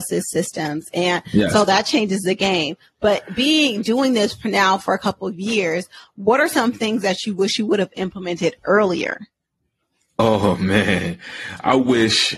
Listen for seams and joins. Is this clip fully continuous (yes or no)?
yes